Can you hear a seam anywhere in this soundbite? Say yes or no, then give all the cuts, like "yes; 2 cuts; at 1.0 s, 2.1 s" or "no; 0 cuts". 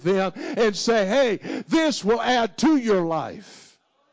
no; 0 cuts